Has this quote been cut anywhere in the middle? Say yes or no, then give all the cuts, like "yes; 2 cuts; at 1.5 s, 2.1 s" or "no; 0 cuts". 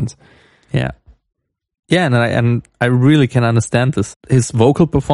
yes; 1 cut; at 4.1 s